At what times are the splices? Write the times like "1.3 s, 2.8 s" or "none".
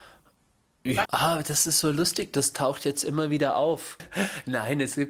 1.0 s, 4.0 s